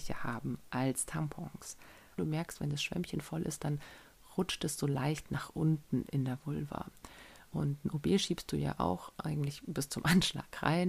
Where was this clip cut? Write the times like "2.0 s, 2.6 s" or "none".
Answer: 2.2 s